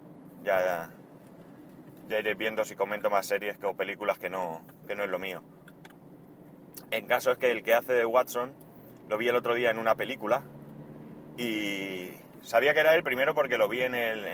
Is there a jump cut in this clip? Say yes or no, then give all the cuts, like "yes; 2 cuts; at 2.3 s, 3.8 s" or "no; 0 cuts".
no; 0 cuts